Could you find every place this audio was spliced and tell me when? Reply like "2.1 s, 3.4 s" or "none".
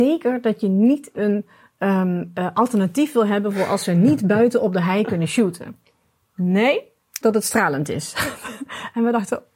7.2 s